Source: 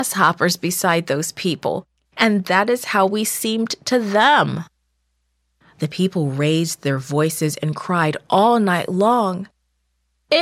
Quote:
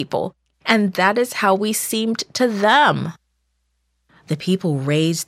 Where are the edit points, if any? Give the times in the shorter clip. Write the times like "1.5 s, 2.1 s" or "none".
none

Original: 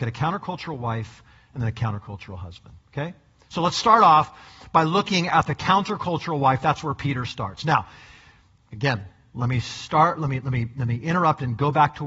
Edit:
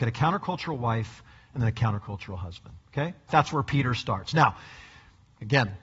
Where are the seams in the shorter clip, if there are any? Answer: 3.3 s

